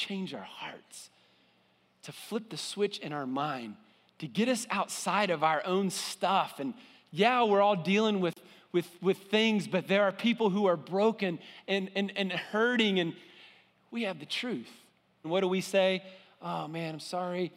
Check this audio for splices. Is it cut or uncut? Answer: cut